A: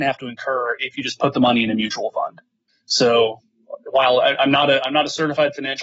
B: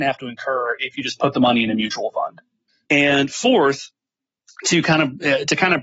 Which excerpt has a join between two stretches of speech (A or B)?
B